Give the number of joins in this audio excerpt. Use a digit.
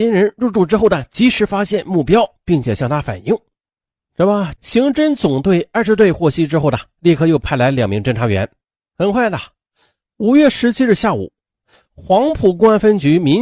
2